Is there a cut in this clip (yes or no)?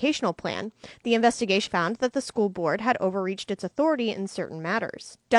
yes